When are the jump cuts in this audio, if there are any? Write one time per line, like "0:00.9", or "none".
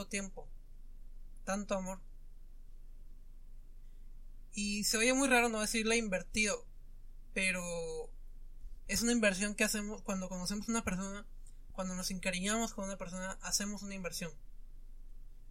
none